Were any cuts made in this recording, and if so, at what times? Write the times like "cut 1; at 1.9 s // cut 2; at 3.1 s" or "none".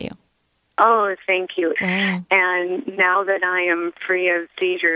cut 1; at 1.8 s